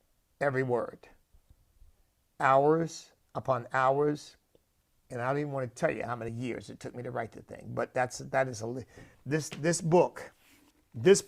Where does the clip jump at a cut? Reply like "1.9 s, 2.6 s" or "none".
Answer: none